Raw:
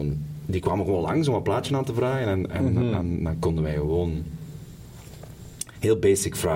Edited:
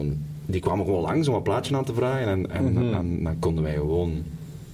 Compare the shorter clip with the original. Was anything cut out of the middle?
no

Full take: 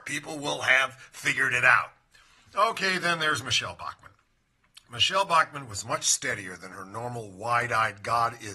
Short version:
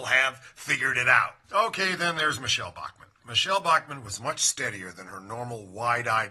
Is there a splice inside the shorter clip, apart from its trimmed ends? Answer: yes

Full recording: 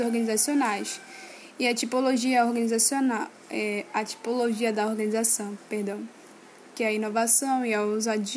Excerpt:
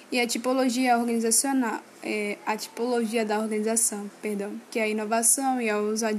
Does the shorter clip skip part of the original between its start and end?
yes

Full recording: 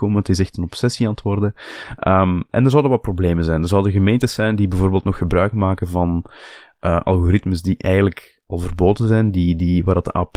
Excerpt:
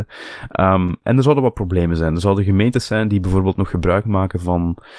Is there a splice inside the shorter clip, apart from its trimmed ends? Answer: no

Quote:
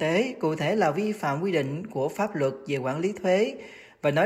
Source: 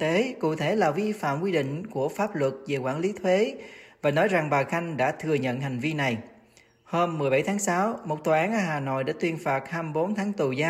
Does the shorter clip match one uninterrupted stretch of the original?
yes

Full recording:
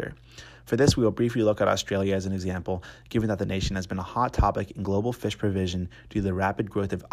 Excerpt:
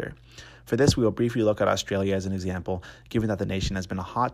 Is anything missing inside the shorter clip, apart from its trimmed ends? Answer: no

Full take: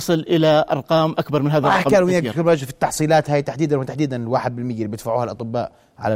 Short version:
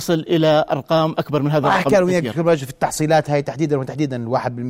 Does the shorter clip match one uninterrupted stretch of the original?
yes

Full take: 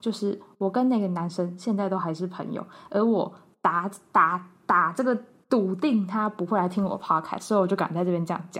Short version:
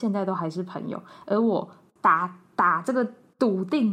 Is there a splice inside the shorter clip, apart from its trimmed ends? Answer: yes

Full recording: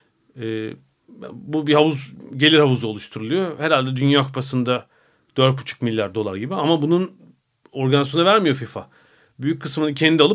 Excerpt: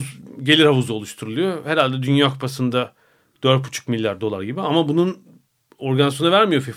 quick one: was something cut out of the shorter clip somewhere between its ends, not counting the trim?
no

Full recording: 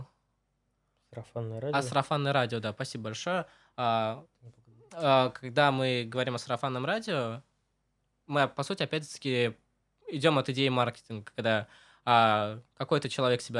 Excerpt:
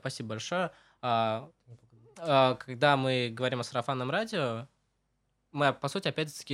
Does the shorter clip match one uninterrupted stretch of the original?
yes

